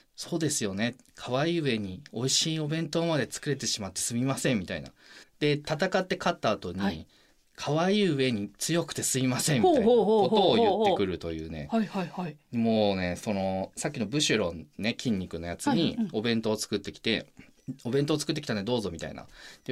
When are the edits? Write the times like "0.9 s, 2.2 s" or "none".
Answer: 5.2 s, 17.6 s